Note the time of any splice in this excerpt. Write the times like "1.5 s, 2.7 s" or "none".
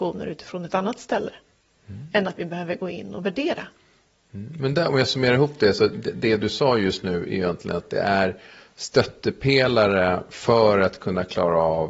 none